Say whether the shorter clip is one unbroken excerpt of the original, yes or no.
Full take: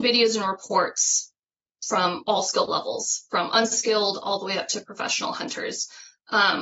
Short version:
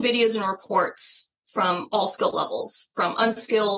no